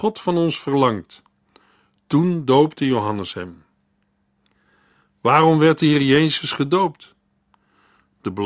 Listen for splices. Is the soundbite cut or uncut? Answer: uncut